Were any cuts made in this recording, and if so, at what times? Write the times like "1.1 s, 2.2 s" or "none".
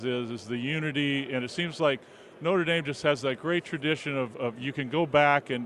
none